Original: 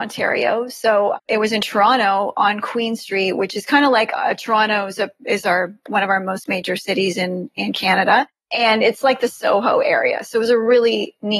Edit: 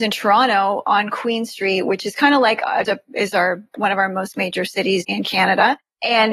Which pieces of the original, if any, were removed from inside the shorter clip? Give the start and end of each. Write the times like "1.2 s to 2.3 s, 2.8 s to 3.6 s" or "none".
4.4 s to 5.0 s, 7.1 s to 7.5 s

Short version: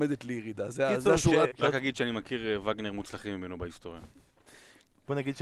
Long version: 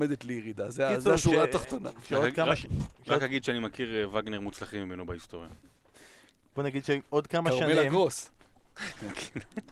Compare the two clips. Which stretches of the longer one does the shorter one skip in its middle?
1.5 s to 3.0 s

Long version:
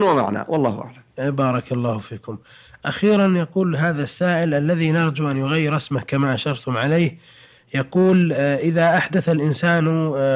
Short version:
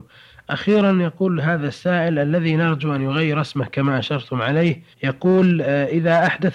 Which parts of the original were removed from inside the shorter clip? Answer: 7.3 s to 7.6 s

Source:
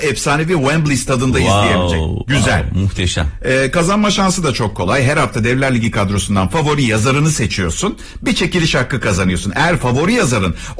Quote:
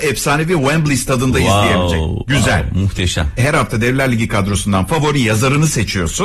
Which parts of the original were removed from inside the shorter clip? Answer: 3.4 s to 5.0 s

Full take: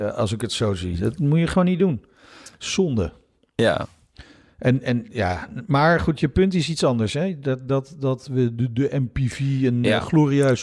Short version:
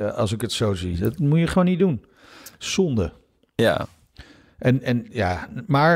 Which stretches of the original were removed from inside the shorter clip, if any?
none

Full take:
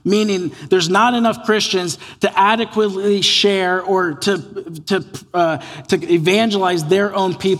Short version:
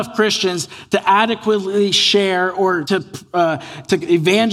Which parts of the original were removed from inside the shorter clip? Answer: 4.1 s to 4.8 s

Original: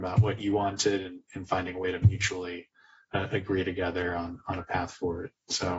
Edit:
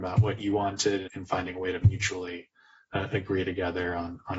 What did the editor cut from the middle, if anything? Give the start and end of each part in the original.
1.1 s to 1.3 s

